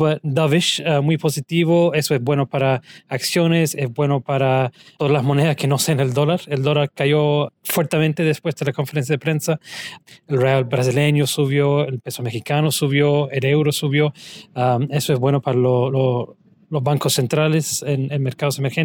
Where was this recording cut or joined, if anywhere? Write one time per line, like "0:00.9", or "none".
none